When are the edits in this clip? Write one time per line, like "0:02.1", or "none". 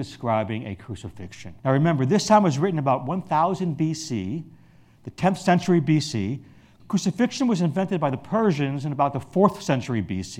0:01.6
0:06.8